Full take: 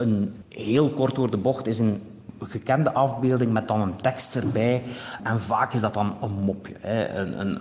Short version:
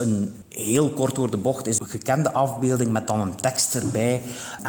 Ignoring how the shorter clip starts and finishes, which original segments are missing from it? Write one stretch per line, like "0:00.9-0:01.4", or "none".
0:01.8-0:02.4